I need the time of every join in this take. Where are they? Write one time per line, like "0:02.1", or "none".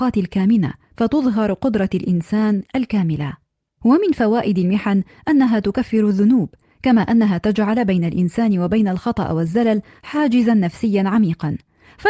0:03.8